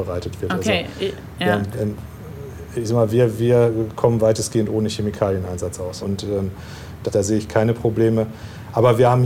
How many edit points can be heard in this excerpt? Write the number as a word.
two